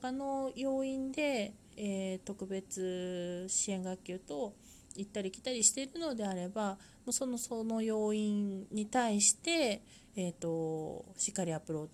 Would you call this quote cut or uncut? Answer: uncut